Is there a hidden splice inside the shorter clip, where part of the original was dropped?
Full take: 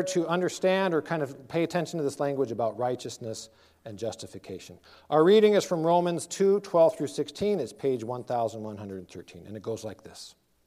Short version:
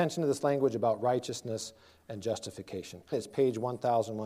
yes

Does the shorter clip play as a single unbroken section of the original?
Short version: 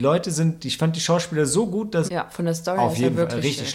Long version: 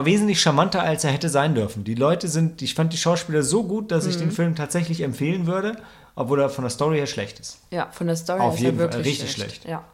no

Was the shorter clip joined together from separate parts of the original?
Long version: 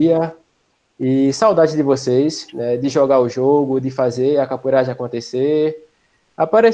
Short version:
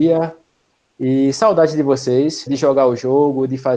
yes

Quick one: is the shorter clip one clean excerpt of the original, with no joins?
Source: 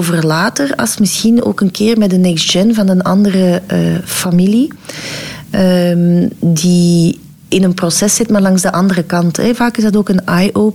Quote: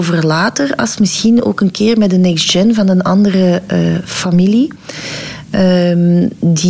yes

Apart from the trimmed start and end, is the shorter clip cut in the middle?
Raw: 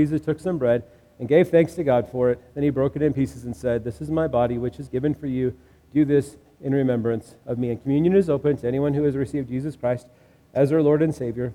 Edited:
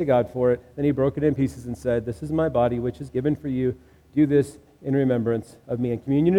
no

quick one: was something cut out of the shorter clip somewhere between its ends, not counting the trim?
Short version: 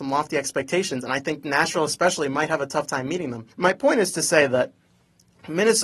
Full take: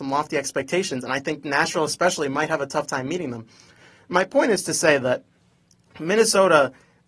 yes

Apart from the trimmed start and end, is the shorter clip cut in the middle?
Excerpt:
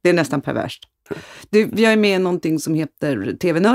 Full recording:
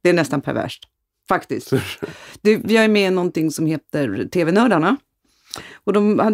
yes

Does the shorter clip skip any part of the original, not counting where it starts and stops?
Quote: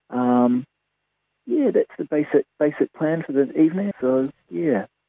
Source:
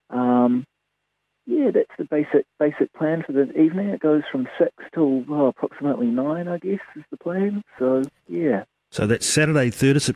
yes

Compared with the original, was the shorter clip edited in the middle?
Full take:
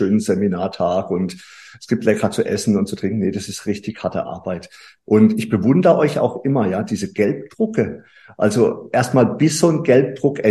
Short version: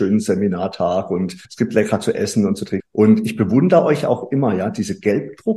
yes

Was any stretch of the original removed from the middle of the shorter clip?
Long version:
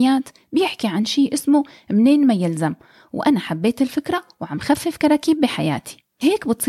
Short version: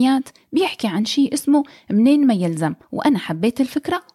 yes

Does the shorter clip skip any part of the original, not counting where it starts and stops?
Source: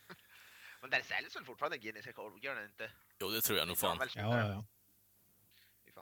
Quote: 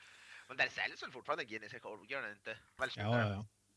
yes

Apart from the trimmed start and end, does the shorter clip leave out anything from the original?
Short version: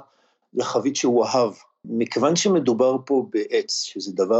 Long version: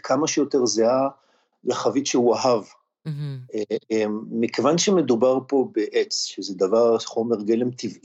yes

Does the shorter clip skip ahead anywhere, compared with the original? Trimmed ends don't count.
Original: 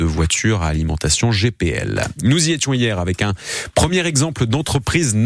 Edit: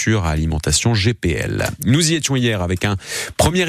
no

